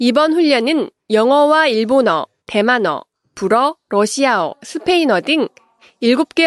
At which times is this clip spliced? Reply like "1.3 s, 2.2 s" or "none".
2.4 s